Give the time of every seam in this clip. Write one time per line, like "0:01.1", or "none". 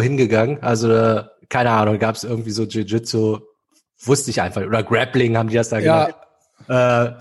none